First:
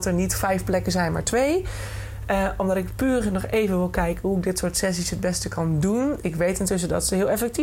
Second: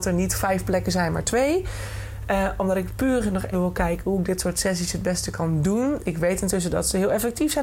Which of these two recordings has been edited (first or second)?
second